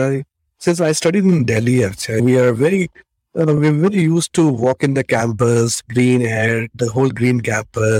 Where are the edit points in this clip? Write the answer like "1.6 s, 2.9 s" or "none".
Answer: none